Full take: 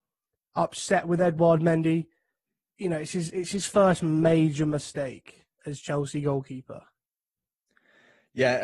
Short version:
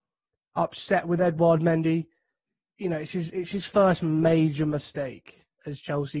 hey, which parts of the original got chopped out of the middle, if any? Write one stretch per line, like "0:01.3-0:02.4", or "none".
none